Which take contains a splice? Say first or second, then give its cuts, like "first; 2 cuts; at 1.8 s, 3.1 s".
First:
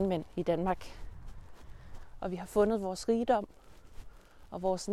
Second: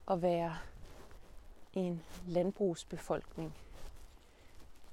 first; 1 cut; at 2.1 s